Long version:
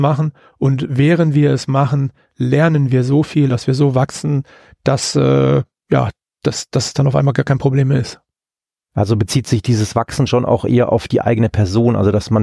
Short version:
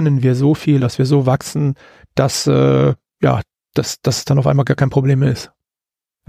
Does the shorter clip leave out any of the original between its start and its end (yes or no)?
no